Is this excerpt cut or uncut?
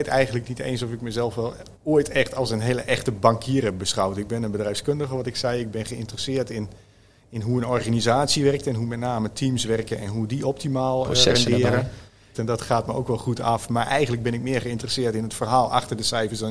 cut